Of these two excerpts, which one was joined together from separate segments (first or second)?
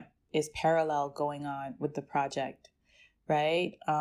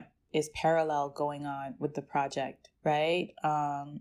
second